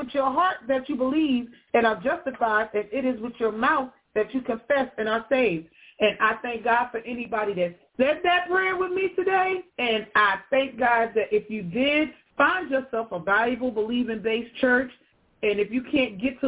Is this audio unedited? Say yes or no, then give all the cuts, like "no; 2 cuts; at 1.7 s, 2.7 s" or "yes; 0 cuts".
no; 1 cut; at 9.7 s